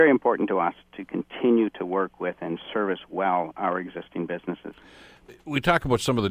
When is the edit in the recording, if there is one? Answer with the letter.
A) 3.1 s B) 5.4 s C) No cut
C